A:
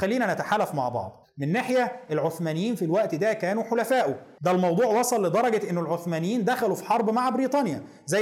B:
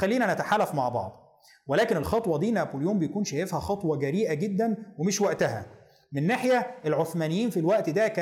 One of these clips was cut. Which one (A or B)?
A